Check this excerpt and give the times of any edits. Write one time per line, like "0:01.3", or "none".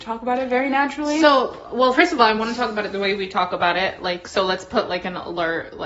none